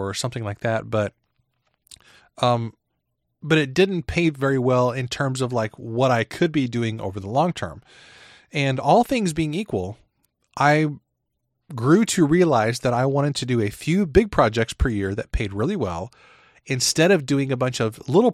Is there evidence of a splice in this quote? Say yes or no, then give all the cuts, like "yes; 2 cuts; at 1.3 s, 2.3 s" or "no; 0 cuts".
no; 0 cuts